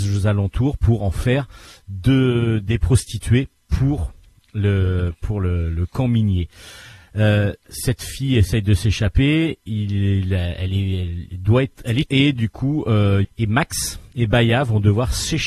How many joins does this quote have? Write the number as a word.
two